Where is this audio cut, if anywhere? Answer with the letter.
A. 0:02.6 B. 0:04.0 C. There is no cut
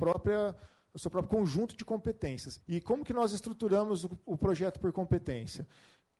A